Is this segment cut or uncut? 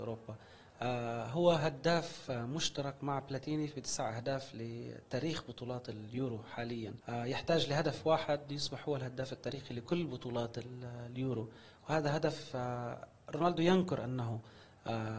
cut